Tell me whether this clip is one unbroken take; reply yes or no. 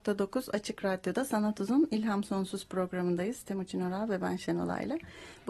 yes